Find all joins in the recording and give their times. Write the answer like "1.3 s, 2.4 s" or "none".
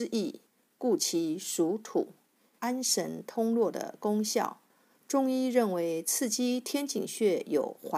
2.6 s